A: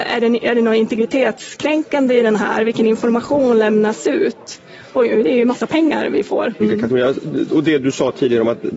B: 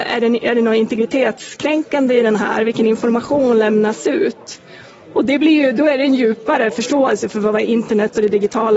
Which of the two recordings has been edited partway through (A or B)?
A